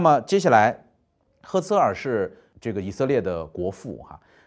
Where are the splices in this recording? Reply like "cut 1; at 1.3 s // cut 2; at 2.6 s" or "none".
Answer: cut 1; at 1.2 s